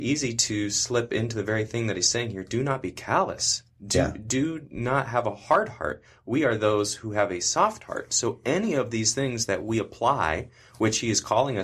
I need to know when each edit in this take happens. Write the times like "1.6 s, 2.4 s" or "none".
none